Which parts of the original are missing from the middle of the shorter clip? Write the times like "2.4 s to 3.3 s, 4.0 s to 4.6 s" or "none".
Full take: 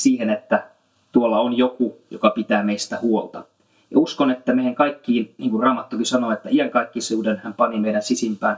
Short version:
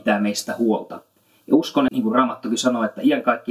4.3 s to 5.4 s